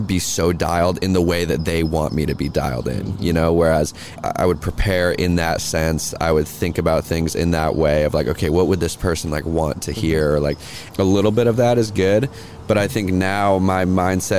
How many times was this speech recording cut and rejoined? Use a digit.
2